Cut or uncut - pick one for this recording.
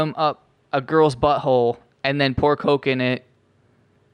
uncut